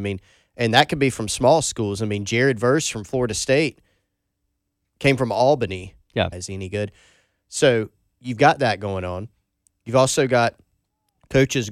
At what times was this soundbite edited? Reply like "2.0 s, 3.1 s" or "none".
6.3 s